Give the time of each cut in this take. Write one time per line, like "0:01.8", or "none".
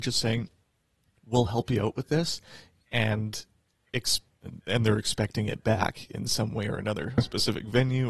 0:07.2

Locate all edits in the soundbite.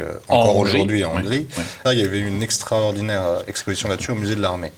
0:01.8

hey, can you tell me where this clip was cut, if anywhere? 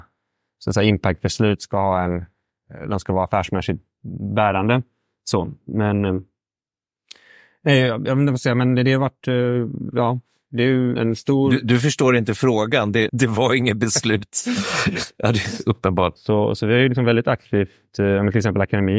0:11.0
0:13.1
0:16.2

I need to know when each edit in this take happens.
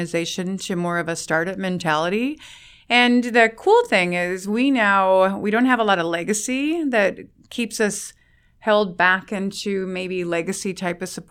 none

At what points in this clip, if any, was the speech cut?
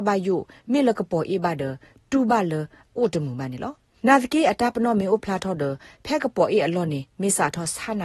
none

